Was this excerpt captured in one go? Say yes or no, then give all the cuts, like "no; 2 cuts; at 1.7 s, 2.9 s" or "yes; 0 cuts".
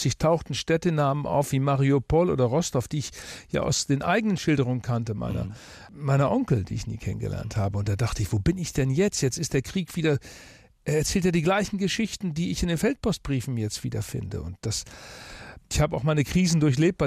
yes; 0 cuts